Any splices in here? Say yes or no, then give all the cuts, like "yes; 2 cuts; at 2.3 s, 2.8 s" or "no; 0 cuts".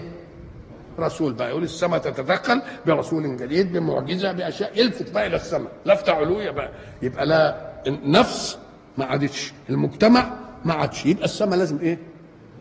yes; 1 cut; at 1.0 s